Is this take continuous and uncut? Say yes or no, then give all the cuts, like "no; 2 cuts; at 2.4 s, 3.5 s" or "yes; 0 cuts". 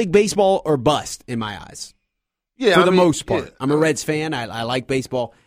yes; 0 cuts